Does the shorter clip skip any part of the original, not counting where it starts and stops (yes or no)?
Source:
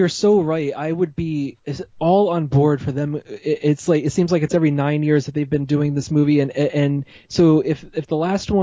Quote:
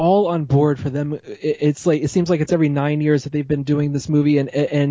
no